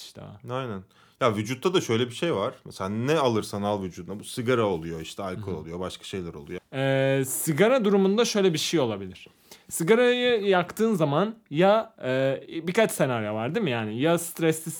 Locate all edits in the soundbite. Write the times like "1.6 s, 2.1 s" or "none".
6.6 s